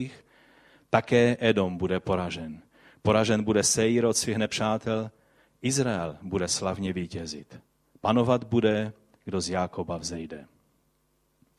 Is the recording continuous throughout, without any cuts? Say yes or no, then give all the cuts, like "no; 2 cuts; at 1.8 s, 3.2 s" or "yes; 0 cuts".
yes; 0 cuts